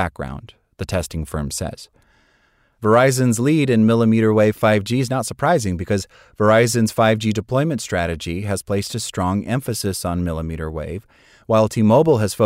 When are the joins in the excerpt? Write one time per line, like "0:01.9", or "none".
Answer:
none

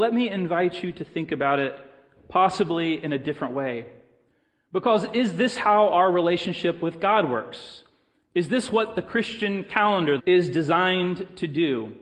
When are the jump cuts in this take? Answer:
0:10.2

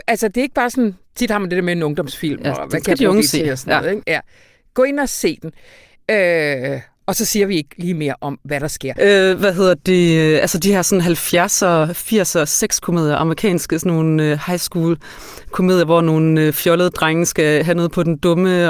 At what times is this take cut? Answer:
0:09.0

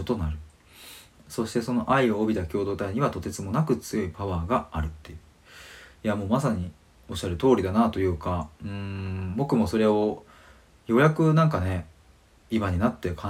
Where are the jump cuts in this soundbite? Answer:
none

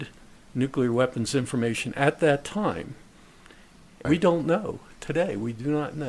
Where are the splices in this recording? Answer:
0:04.0

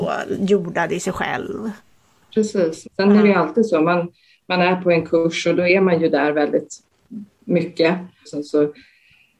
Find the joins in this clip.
0:02.8
0:08.3

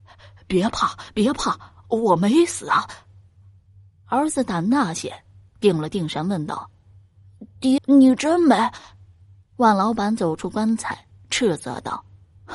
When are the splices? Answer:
0:07.8

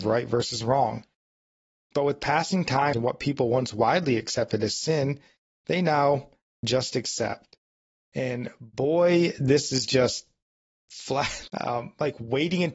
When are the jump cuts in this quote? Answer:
0:02.9
0:11.5

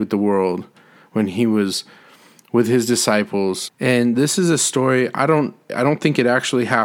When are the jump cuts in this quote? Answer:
0:03.7
0:05.7

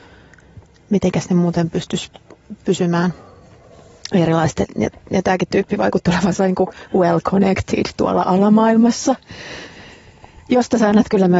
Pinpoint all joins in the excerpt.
none

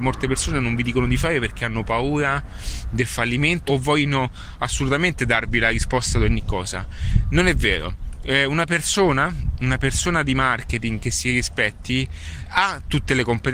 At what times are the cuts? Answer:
0:03.7
0:12.4

